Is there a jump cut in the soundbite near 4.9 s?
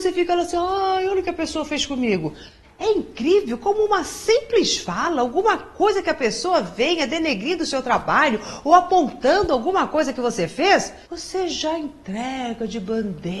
no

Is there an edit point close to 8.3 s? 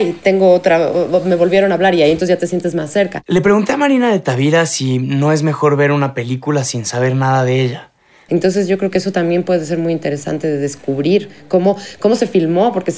yes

